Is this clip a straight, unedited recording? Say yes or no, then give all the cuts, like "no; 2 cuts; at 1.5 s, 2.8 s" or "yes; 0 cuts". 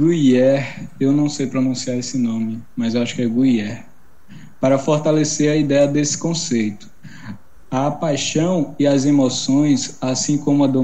yes; 0 cuts